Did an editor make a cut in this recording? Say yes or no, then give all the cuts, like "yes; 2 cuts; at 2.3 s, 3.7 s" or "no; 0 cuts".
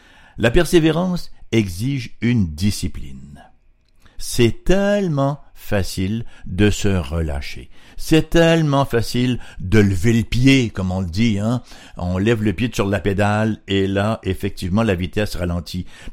no; 0 cuts